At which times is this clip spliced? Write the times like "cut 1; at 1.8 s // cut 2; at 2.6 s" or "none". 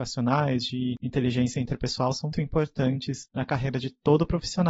cut 1; at 2.3 s